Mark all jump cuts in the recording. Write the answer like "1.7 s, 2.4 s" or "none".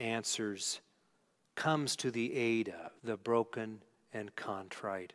1.5 s, 3.0 s